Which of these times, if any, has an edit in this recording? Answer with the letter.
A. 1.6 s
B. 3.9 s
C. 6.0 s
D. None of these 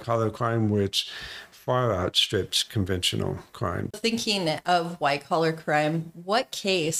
B